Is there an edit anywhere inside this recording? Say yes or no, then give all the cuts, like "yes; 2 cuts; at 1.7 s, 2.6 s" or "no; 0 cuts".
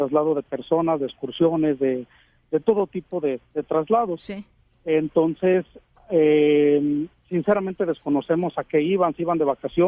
no; 0 cuts